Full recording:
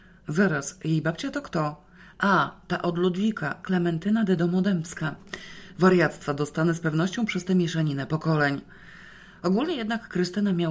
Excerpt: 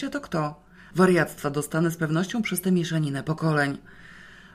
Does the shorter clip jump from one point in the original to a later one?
yes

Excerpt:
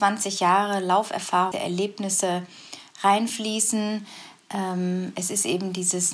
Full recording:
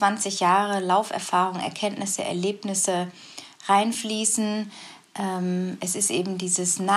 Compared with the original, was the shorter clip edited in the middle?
yes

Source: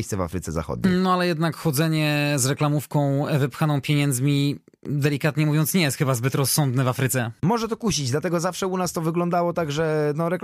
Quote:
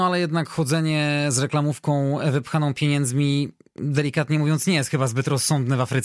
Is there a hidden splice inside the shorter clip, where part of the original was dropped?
no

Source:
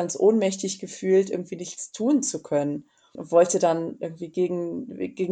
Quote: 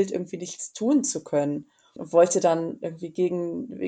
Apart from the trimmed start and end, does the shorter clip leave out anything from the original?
no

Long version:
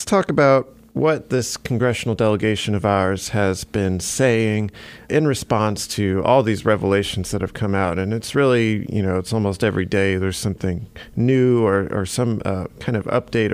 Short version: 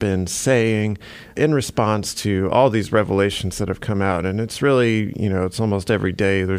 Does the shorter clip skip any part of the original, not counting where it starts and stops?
no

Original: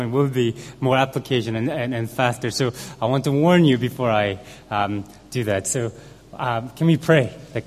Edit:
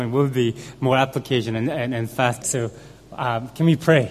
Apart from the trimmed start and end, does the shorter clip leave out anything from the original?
yes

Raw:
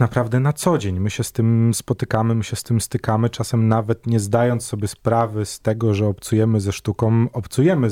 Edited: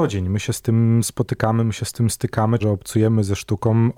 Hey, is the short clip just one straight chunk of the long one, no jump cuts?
no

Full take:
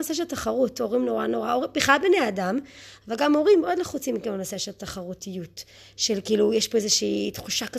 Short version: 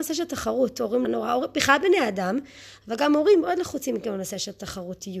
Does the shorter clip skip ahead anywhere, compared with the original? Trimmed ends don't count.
yes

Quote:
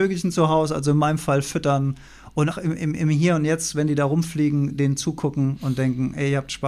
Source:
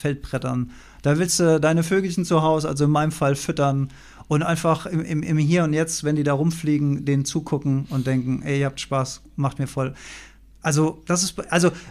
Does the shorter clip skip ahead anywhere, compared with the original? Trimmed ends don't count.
yes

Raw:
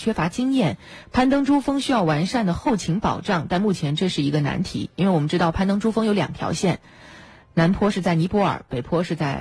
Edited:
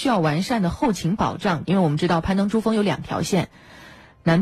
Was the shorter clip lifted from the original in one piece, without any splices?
no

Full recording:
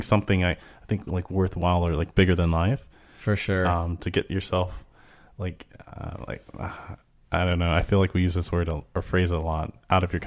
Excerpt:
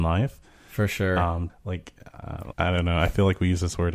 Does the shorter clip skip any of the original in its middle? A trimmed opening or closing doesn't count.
yes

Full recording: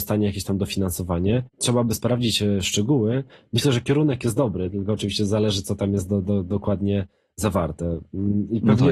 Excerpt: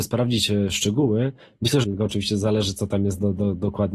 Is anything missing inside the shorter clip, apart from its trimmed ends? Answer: yes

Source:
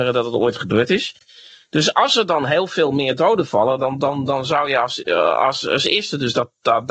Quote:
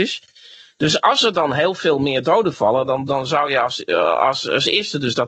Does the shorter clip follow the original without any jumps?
no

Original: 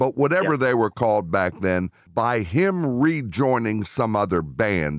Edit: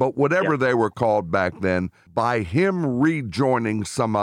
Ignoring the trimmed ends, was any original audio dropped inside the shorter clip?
no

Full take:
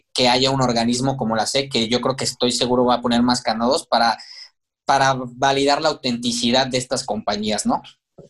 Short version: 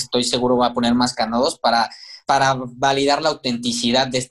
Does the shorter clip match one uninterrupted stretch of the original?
no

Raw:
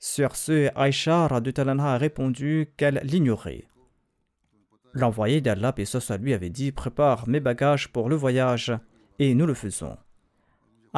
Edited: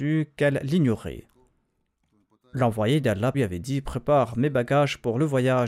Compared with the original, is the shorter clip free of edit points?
no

